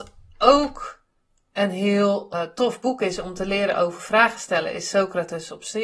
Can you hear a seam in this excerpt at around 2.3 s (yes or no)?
yes